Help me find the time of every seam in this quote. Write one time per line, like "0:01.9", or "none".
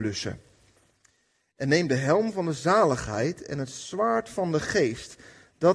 none